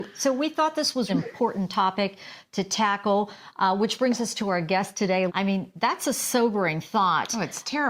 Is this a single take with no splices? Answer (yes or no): no